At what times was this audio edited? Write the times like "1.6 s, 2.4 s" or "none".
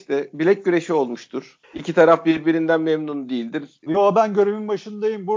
3.9 s